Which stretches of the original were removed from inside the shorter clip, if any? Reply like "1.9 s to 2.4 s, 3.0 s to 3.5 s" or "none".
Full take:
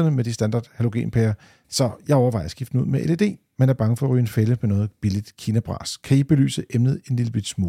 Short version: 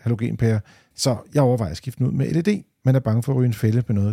none